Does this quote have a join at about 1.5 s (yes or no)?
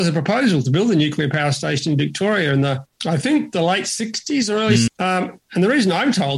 no